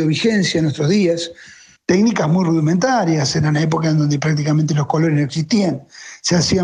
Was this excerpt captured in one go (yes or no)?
no